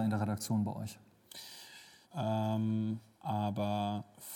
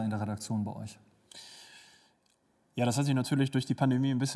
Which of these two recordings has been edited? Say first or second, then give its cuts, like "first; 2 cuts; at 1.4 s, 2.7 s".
first; 1 cut; at 2.0 s